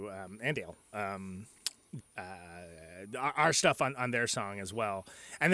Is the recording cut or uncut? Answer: cut